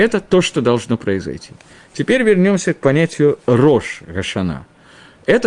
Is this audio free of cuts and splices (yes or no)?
yes